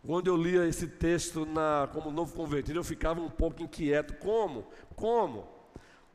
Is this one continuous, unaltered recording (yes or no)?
yes